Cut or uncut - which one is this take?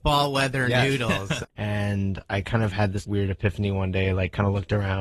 cut